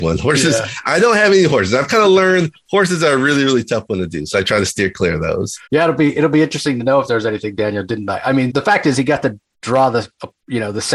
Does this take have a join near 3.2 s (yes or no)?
no